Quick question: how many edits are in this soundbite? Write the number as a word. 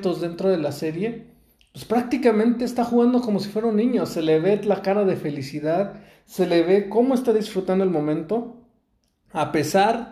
zero